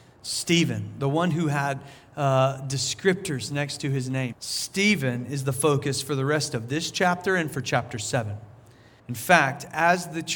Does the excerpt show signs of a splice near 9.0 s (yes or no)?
yes